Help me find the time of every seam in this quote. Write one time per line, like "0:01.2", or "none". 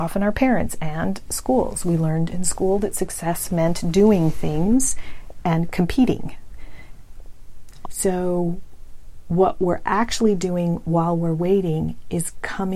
0:07.8